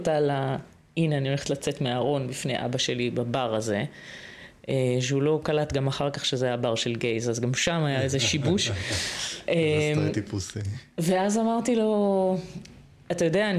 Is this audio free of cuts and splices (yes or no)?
yes